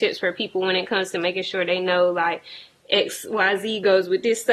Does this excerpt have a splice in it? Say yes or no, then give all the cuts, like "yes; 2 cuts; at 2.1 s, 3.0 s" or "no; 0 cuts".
no; 0 cuts